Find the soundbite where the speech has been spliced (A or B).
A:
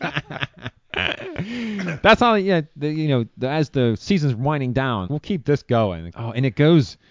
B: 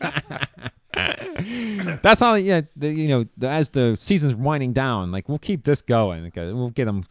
A